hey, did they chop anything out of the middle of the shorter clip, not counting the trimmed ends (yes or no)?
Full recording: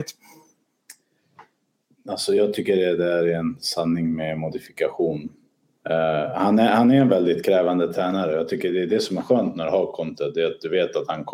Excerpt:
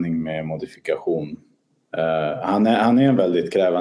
no